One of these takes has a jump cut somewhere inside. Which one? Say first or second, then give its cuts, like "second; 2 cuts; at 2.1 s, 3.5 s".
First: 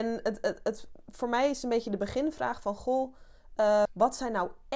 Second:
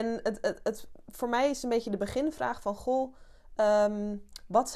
first; 1 cut; at 3.9 s